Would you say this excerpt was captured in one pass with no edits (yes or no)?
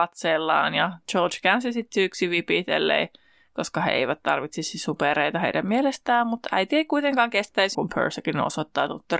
no